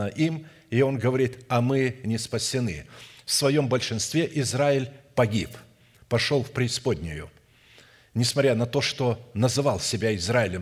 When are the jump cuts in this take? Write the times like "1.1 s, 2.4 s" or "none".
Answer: none